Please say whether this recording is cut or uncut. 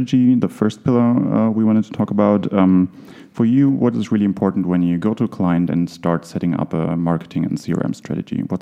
uncut